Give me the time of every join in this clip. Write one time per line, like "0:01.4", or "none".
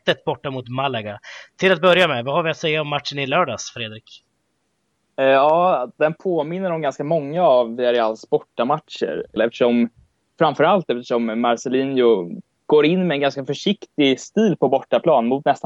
0:09.4